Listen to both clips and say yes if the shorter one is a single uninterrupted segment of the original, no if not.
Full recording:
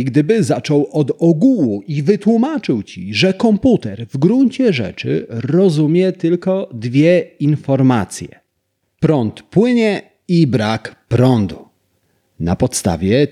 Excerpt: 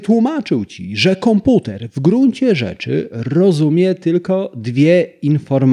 yes